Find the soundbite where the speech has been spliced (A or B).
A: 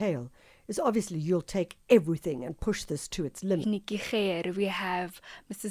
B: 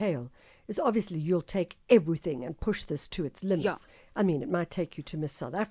A